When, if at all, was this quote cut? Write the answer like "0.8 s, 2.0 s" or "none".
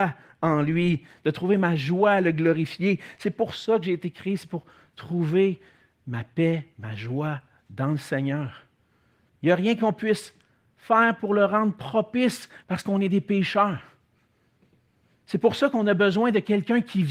9.3 s, 12.6 s